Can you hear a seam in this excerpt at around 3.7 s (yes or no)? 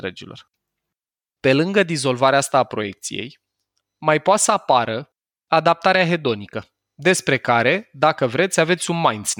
no